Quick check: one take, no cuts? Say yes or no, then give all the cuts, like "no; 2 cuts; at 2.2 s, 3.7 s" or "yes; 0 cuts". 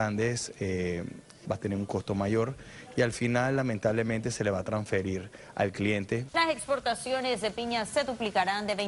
no; 2 cuts; at 1.4 s, 6.3 s